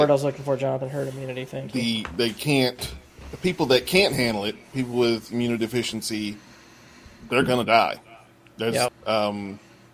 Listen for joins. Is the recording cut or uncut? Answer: cut